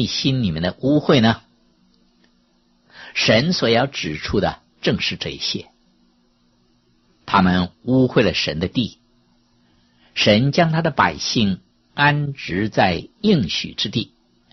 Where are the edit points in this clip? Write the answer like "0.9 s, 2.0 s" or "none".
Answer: none